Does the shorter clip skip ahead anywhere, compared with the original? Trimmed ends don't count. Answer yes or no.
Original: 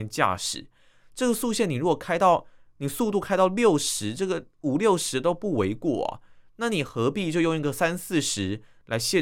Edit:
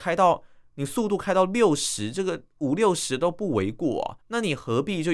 yes